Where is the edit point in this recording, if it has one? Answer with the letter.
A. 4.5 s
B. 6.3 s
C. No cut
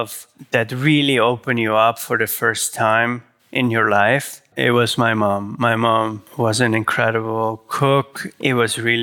A